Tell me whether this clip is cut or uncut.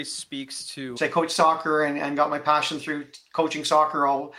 cut